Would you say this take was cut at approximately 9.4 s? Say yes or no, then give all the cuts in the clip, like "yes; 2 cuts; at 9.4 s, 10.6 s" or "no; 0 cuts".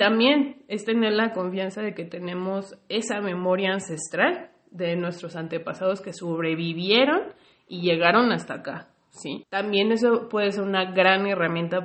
yes; 1 cut; at 9.4 s